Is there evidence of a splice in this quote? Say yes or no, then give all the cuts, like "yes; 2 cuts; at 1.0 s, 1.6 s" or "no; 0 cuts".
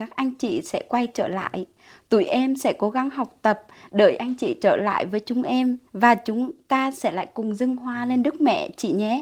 yes; 1 cut; at 5.9 s